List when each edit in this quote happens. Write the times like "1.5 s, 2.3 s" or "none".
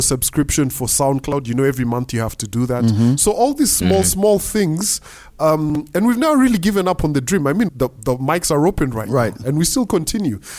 7.7 s